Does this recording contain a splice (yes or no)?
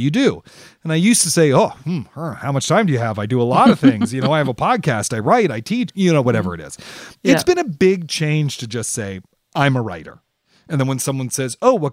yes